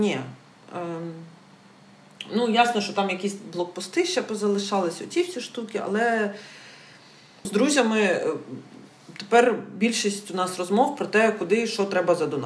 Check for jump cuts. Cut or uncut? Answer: cut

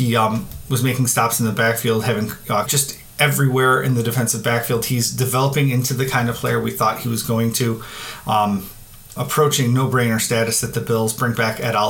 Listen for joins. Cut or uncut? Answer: cut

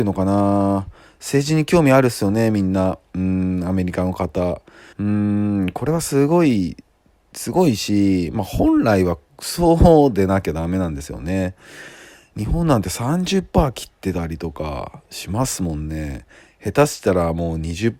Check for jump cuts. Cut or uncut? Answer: cut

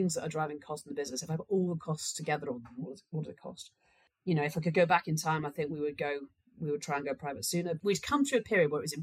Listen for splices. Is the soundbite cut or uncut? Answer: cut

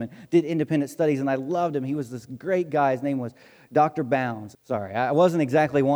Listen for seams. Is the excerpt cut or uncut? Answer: cut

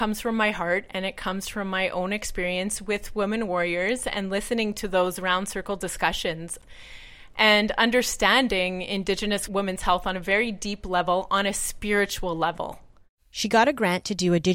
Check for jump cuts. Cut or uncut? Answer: uncut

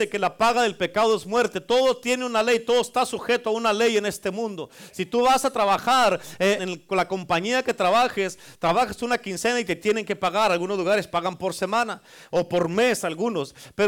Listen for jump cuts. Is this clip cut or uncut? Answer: cut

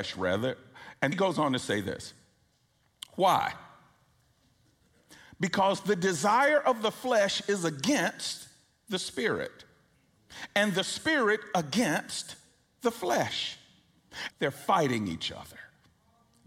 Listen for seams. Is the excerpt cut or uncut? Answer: cut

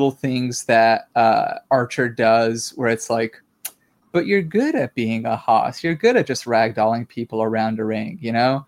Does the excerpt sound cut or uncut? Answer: uncut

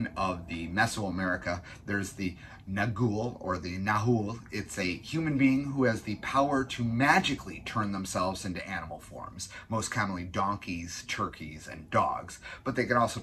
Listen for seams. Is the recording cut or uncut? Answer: uncut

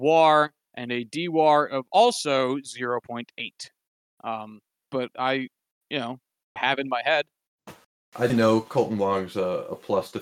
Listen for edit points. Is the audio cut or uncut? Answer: cut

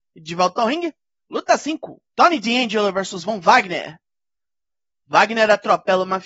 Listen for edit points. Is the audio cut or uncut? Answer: uncut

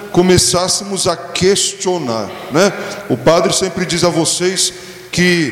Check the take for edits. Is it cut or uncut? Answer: uncut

